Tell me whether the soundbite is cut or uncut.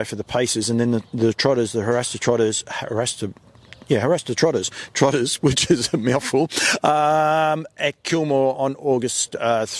uncut